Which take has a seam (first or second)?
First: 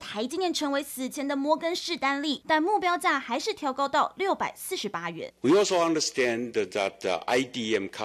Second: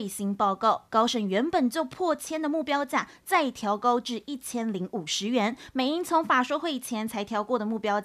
first